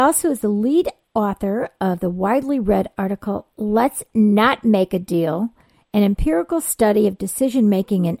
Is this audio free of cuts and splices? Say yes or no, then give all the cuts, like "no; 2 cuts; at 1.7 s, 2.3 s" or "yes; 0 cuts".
yes; 0 cuts